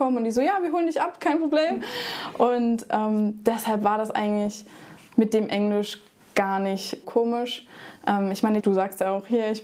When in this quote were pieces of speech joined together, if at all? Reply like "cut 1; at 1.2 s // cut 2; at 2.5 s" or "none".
cut 1; at 7.0 s // cut 2; at 8.6 s

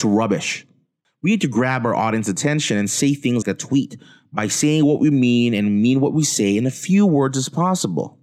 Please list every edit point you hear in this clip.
cut 1; at 3.4 s

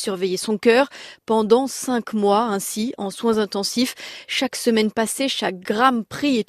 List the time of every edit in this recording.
none

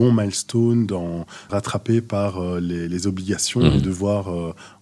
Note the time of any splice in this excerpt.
cut 1; at 1.5 s

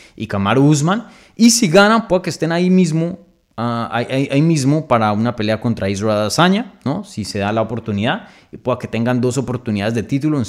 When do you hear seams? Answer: none

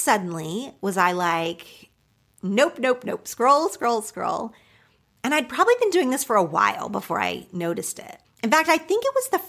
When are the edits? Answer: cut 1; at 8.2 s

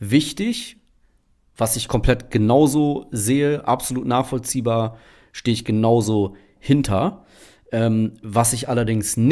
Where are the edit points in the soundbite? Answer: none

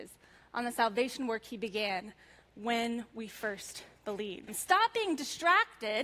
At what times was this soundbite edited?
cut 1; at 4.5 s

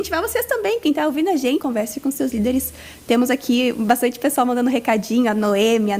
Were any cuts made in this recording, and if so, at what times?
cut 1; at 1.6 s

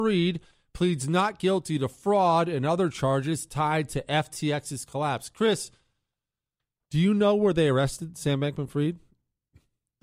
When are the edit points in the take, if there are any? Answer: none

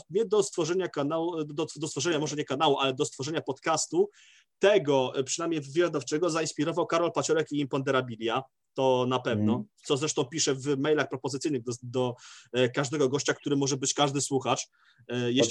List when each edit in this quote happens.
none

